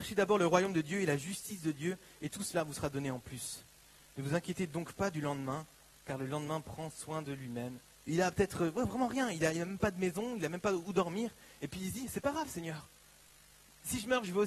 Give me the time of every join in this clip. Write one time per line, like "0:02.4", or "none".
0:07.9